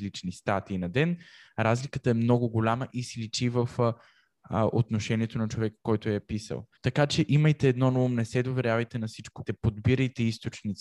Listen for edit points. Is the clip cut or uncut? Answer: cut